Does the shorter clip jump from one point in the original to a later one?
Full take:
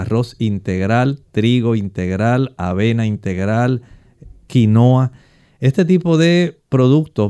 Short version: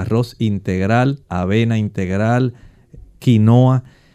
yes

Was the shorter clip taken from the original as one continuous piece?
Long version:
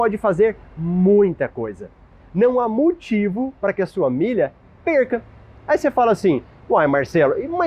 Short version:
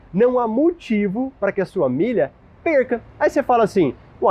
no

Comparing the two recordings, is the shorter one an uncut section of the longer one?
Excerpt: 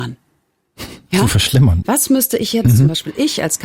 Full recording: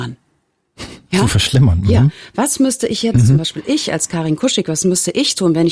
no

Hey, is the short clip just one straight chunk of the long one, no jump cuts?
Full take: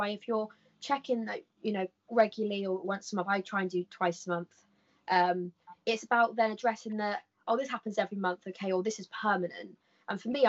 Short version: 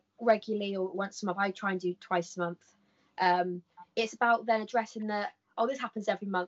yes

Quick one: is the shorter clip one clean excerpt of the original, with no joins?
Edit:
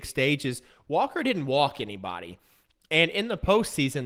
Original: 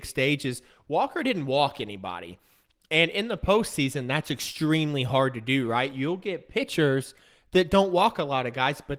yes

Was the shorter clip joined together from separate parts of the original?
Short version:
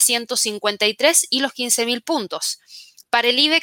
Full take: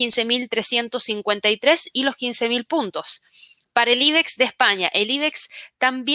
no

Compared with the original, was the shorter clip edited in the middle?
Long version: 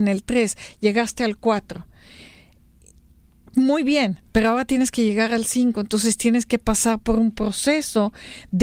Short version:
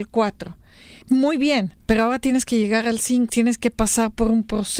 yes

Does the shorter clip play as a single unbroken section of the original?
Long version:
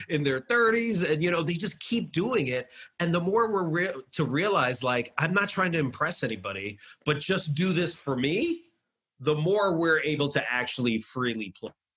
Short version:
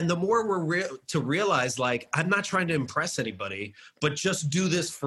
yes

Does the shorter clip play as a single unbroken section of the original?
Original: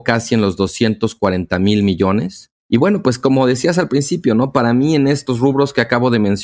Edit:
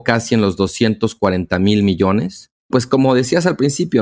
no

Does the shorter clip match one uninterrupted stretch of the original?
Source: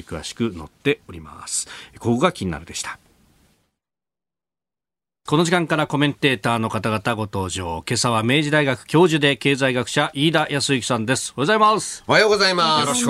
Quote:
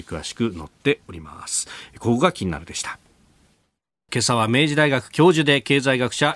no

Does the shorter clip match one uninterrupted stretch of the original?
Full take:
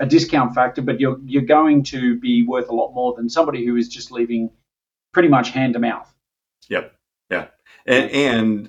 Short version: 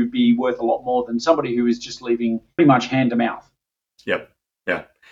no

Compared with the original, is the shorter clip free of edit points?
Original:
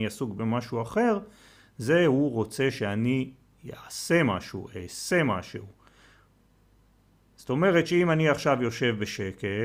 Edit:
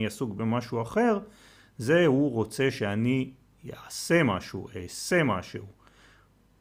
yes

